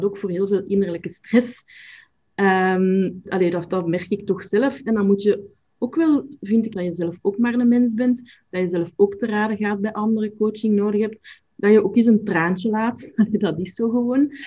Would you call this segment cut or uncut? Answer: cut